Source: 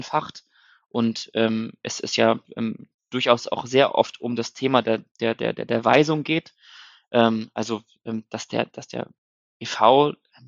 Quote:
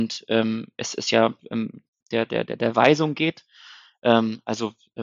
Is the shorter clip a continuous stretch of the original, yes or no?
no